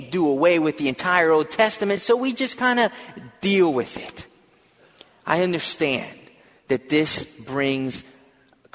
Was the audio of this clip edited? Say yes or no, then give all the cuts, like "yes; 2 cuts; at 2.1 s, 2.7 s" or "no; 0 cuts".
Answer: no; 0 cuts